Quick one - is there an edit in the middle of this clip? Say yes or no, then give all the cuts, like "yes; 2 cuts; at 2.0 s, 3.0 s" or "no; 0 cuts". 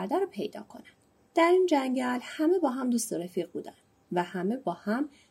yes; 1 cut; at 1.3 s